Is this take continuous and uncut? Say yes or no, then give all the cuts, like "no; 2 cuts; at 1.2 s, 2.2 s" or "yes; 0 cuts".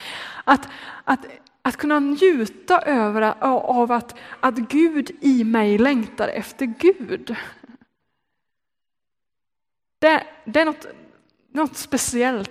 yes; 0 cuts